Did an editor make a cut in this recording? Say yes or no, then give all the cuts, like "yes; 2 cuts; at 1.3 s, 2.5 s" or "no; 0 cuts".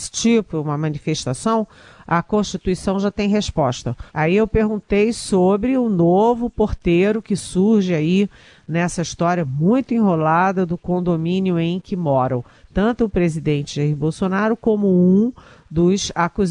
yes; 1 cut; at 4.1 s